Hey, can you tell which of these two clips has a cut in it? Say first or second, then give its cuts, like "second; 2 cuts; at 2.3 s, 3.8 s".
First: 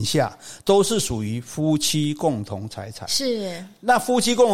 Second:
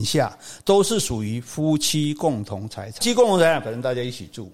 second; 1 cut; at 3.0 s